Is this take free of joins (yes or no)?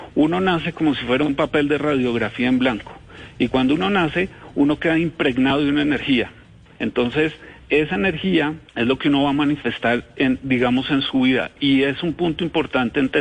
no